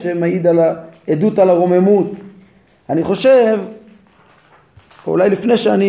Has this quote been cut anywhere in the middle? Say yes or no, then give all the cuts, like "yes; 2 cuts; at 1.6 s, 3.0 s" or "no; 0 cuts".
no; 0 cuts